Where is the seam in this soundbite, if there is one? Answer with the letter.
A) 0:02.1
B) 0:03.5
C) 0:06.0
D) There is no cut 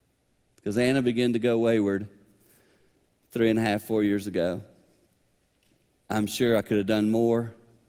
C